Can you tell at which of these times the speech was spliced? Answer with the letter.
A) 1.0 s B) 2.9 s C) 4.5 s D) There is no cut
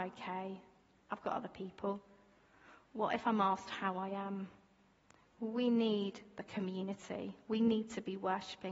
B